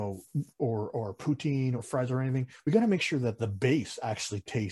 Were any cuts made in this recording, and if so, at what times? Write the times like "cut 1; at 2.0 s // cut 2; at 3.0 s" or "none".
cut 1; at 1.8 s